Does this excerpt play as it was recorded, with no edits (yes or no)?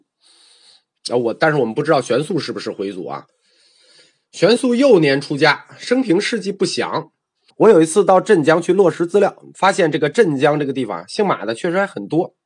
no